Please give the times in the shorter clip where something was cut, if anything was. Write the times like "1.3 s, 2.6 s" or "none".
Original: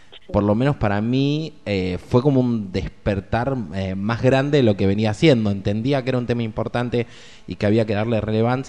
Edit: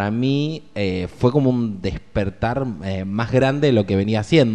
none